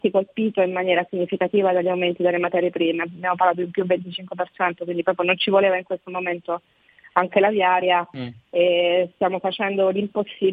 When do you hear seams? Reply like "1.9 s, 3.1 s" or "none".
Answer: none